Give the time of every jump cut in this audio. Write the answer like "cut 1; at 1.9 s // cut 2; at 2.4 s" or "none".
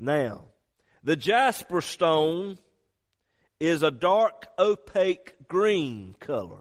none